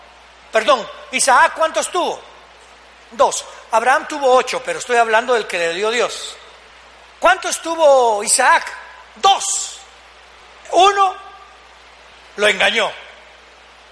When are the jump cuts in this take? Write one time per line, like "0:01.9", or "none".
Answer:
none